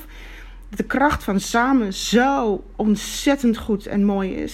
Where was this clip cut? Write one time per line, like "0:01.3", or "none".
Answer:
none